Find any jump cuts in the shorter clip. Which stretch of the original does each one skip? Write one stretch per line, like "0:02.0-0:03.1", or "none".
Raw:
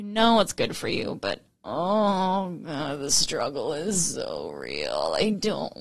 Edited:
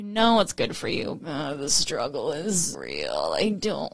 0:01.2-0:02.6
0:04.1-0:04.5